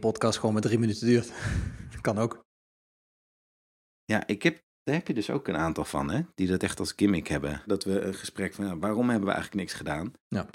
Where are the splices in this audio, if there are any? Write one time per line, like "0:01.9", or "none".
0:04.7
0:07.7